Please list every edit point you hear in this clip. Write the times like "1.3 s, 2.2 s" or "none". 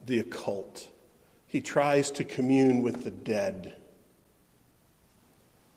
none